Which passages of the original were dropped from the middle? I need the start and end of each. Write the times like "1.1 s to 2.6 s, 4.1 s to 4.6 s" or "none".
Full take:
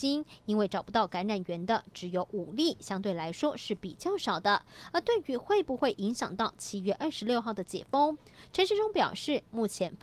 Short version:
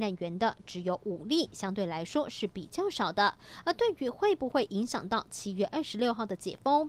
none